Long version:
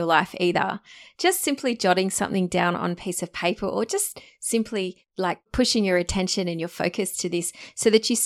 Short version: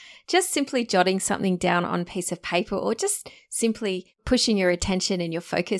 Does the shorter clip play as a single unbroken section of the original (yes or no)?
no